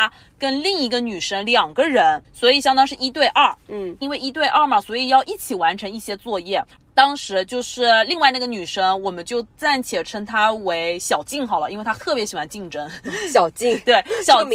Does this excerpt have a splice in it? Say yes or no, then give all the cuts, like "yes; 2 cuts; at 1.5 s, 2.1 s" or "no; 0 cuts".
no; 0 cuts